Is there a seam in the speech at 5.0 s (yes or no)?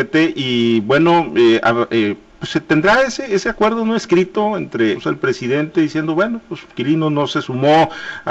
yes